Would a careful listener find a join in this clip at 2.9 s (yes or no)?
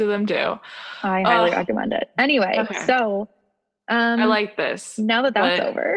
no